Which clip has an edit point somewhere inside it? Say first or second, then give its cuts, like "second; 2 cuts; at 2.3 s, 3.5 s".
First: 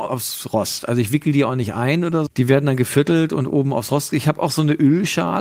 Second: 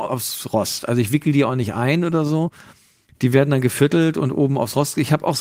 first; 1 cut; at 2.3 s